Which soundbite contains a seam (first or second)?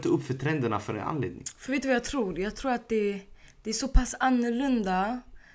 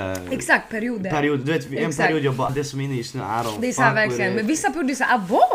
second